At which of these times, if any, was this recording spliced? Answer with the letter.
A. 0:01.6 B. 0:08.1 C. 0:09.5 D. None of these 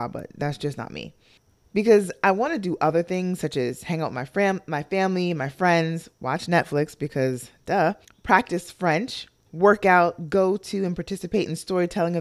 C